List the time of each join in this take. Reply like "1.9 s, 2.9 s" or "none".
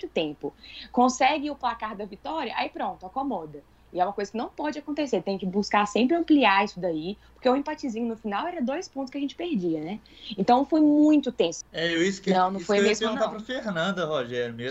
11.6 s